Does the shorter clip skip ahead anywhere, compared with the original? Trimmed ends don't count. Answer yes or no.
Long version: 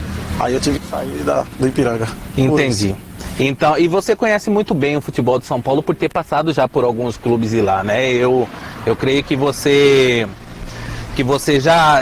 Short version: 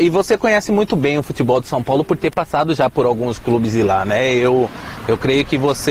no